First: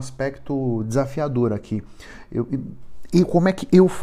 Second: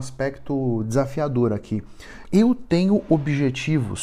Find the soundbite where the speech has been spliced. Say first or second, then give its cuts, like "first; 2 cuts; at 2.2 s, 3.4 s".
second; 1 cut; at 2.2 s